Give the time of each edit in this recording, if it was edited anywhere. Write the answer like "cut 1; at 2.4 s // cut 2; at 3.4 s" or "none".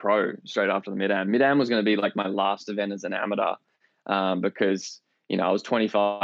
none